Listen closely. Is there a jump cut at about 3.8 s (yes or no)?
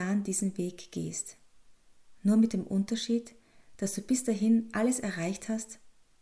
no